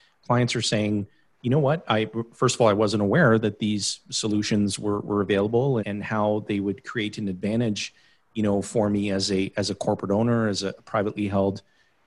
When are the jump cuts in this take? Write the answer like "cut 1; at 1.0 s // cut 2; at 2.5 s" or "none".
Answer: cut 1; at 5.8 s